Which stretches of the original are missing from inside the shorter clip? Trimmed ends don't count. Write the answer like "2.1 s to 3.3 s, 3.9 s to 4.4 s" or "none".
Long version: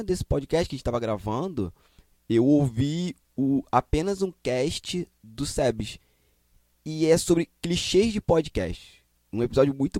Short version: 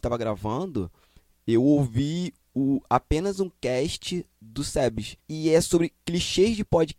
6.0 s to 6.8 s